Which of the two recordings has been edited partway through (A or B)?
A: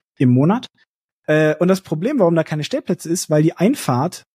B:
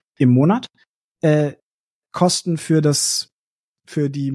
A